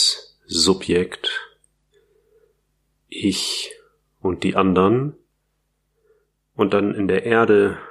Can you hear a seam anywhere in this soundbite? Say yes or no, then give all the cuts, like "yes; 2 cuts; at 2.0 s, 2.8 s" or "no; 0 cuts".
no; 0 cuts